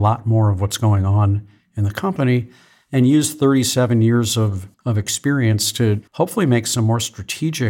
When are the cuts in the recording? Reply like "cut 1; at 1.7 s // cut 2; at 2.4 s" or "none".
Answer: cut 1; at 4.7 s // cut 2; at 6.1 s